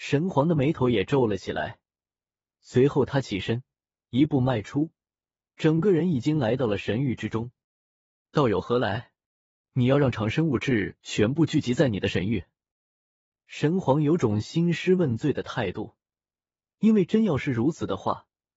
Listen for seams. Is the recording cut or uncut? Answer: cut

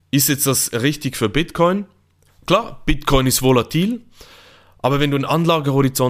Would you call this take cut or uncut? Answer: cut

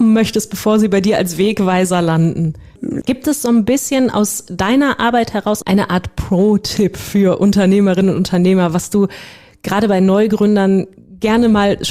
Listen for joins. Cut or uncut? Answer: cut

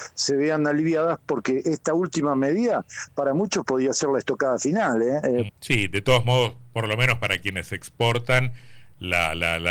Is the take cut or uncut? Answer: cut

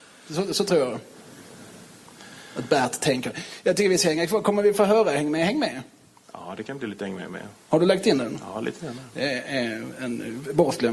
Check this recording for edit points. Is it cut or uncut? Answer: uncut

